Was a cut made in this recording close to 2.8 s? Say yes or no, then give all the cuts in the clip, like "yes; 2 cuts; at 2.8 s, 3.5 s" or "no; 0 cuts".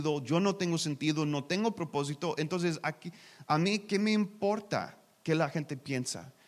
no; 0 cuts